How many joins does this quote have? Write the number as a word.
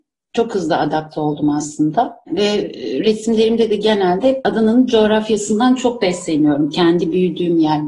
zero